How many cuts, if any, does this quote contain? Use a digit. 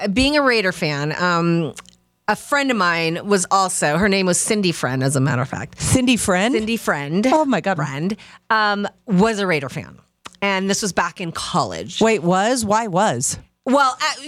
1